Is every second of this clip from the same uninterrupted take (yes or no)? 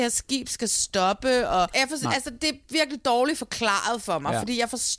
yes